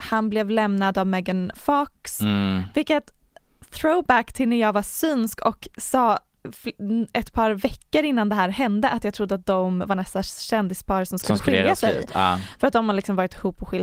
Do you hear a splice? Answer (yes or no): no